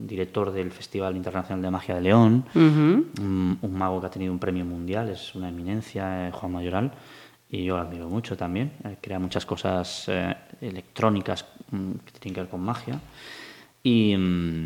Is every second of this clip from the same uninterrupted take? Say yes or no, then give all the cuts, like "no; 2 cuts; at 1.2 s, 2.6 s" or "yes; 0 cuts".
yes; 0 cuts